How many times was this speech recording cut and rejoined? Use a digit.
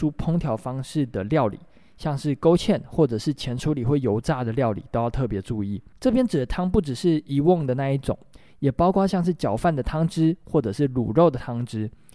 1